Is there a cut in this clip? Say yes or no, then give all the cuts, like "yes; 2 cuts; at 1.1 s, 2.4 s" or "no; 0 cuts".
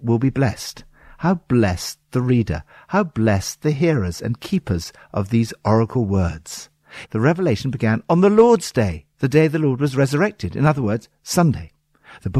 yes; 2 cuts; at 7.1 s, 9.1 s